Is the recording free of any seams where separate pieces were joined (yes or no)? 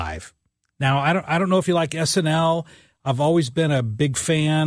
yes